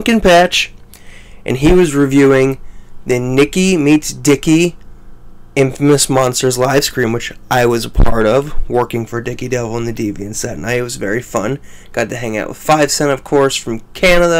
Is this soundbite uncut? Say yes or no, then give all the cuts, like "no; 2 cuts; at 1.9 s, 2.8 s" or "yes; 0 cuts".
yes; 0 cuts